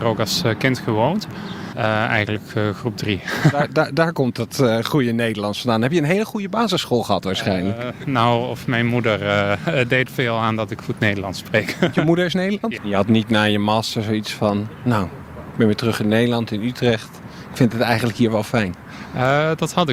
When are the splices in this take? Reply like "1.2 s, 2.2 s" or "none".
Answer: 1.7 s, 10.1 s, 12.8 s